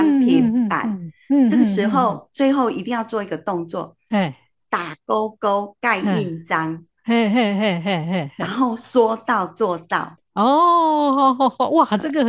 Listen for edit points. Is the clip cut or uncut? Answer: uncut